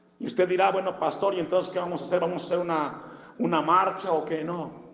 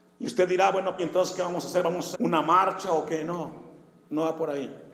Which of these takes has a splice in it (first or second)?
second